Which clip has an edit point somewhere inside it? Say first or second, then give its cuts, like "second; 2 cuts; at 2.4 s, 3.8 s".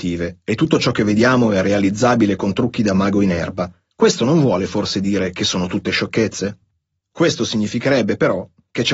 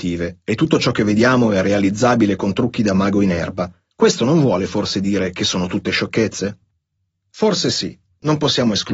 first; 1 cut; at 7.0 s